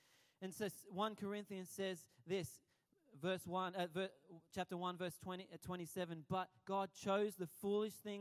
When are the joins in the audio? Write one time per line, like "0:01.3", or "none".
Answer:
none